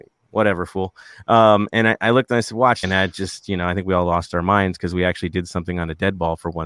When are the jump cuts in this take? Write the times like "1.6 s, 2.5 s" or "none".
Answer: 2.8 s